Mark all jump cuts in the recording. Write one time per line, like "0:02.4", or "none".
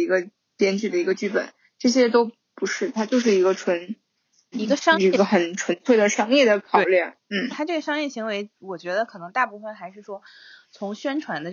0:04.5
0:07.5